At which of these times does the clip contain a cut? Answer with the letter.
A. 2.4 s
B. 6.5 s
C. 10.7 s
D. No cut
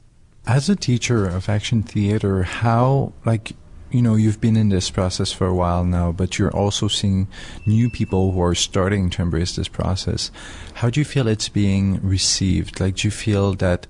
D